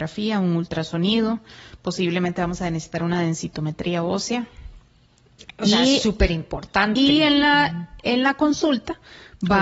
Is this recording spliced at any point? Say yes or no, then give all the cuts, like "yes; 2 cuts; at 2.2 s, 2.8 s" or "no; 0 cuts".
no; 0 cuts